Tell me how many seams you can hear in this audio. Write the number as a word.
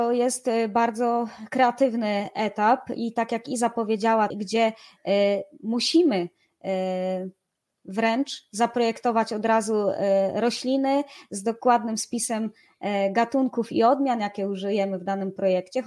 one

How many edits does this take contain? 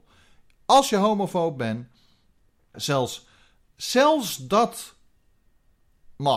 one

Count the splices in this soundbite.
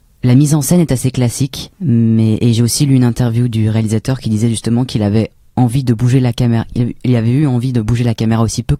one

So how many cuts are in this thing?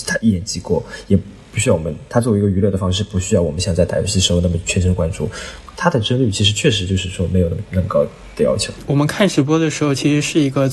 zero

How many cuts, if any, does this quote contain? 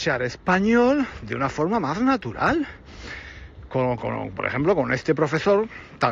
one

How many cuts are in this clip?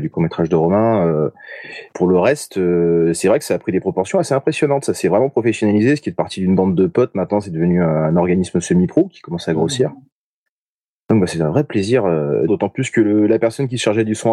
two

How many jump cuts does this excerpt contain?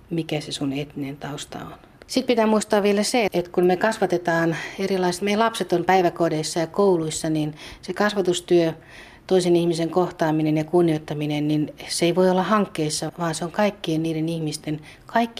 three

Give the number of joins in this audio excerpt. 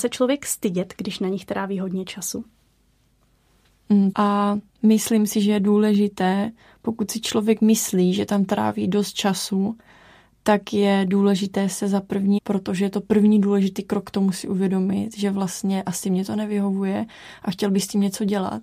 two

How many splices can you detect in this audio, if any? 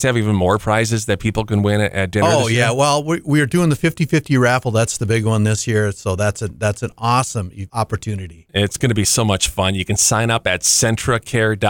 zero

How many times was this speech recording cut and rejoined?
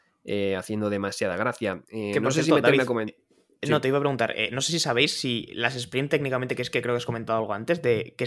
zero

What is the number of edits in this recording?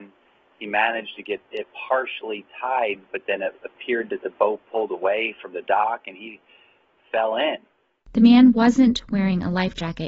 zero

